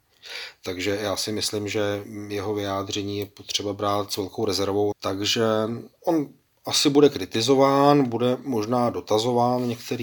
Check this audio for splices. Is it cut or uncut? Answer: cut